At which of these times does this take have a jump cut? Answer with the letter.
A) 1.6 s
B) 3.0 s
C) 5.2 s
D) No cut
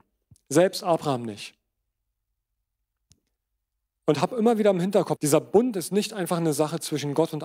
C